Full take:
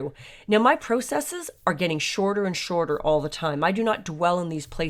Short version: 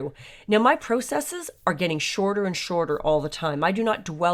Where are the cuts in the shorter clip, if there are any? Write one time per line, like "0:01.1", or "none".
none